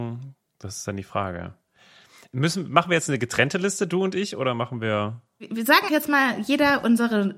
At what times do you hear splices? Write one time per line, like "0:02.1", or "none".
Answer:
0:05.9